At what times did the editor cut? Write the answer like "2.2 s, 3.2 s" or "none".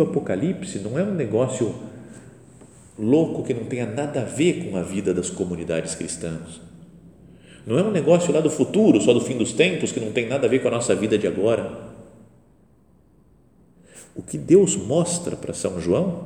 none